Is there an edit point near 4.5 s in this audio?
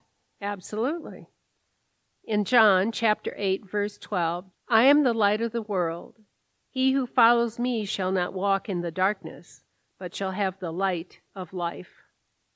yes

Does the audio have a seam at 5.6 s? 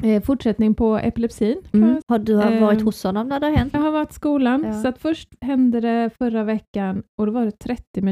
no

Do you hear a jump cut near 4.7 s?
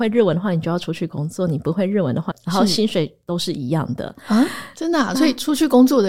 no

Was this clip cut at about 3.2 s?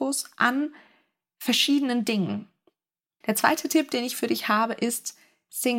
yes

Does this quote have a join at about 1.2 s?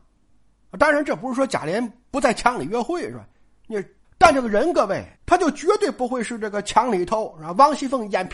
no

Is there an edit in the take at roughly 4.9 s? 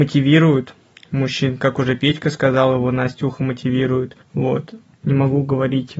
yes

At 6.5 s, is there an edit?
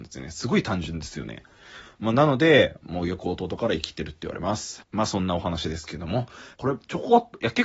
yes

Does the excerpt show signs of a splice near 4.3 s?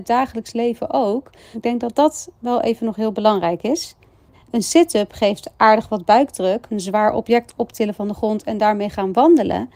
yes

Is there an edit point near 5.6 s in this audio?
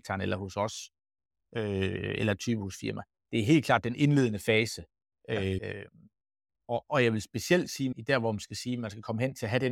yes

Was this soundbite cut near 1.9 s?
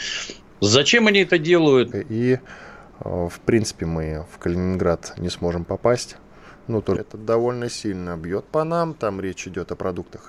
yes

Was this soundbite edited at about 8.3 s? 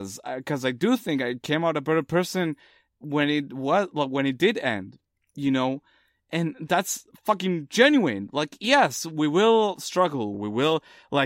no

